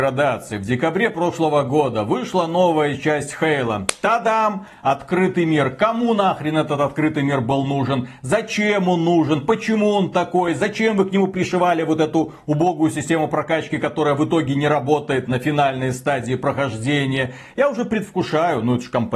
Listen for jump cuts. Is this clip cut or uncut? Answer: uncut